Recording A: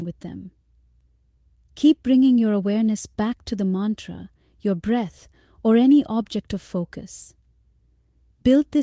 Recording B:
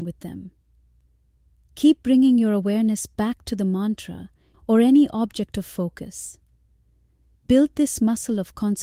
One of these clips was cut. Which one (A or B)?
B